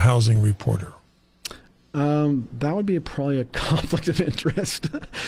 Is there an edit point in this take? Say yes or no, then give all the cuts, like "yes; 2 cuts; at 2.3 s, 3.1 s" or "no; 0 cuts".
no; 0 cuts